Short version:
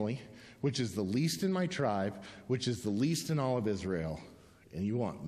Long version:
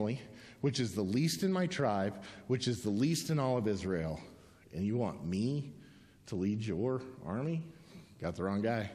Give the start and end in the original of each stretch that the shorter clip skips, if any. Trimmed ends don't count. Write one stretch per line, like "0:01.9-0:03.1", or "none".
none